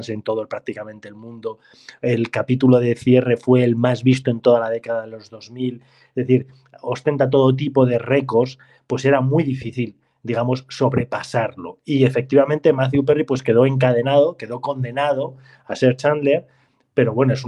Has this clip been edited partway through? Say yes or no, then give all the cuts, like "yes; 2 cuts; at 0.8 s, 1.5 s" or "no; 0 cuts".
no; 0 cuts